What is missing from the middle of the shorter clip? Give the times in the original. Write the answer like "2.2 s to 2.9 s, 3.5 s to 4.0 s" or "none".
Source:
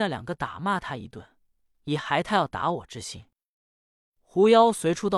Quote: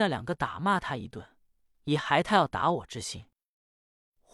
none

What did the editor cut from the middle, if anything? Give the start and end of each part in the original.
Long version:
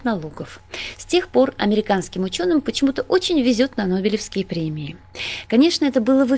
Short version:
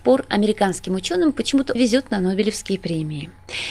3.0 s to 3.4 s

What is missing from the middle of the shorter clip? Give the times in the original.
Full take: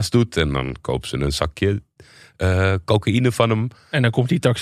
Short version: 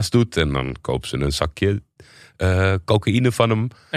none

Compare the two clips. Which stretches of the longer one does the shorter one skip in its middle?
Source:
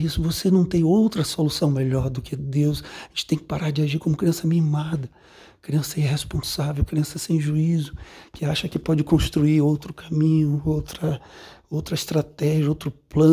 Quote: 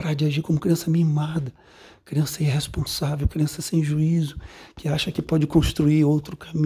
none

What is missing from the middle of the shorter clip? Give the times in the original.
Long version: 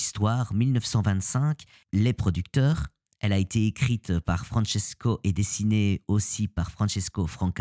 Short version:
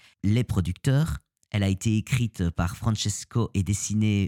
none

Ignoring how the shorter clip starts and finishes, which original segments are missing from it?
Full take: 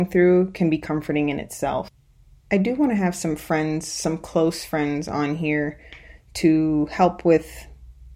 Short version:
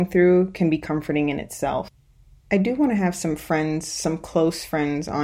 none

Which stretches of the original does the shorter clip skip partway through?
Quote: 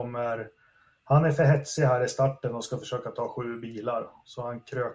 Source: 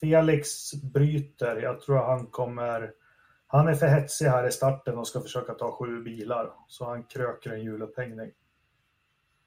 none

